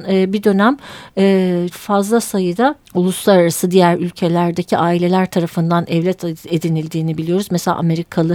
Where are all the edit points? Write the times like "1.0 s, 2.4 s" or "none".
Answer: 1.7 s, 2.8 s

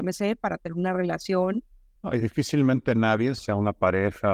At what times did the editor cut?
1.9 s, 3.4 s

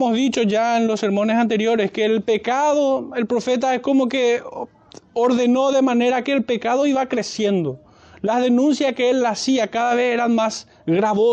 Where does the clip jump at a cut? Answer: none

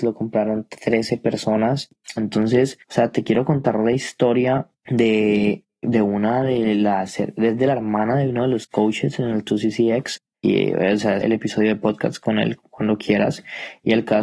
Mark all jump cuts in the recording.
2.2 s, 11.2 s

